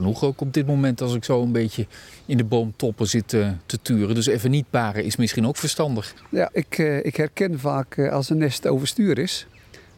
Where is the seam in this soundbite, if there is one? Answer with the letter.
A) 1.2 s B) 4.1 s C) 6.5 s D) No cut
C